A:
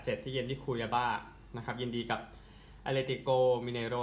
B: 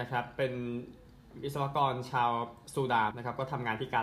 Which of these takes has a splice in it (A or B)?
B